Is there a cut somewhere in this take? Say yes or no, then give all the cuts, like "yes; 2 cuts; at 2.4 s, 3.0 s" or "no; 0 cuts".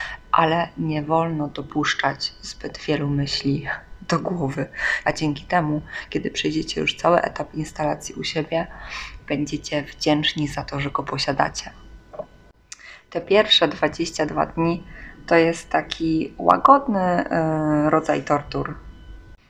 yes; 1 cut; at 5.0 s